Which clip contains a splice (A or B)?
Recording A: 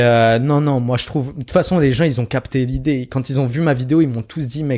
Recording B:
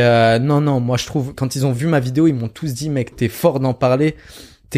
B